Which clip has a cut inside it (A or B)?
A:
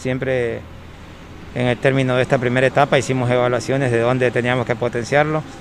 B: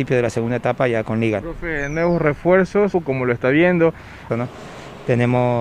B